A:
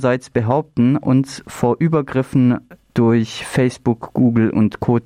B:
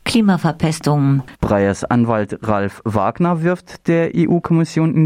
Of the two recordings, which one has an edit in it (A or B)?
B